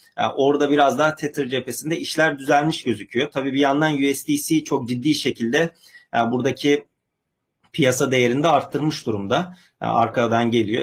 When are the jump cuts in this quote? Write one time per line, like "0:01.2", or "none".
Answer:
none